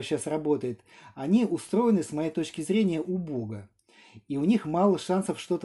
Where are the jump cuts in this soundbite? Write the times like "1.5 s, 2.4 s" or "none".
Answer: 3.0 s